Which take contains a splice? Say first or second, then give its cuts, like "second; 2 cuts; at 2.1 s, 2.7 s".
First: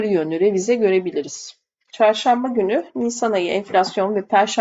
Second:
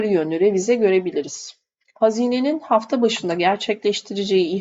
first; 1 cut; at 1.9 s